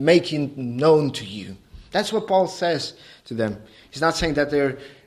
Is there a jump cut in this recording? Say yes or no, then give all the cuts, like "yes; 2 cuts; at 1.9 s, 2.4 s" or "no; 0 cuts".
no; 0 cuts